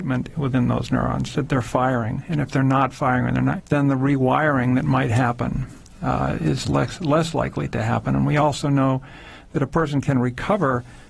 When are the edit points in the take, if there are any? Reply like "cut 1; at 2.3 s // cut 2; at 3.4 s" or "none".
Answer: cut 1; at 3.6 s